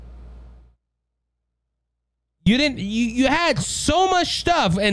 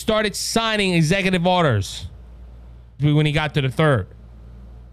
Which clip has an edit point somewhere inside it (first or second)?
second